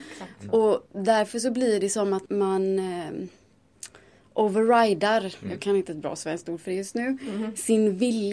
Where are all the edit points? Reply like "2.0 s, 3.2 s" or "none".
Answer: 2.3 s